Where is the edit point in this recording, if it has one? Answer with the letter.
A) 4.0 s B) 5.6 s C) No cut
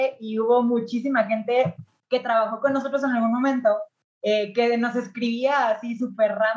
C